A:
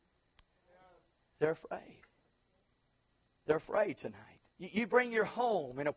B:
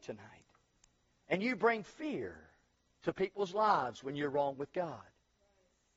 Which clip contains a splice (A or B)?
A